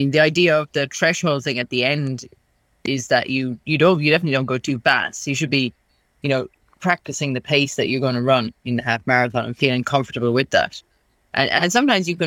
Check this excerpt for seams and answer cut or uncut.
uncut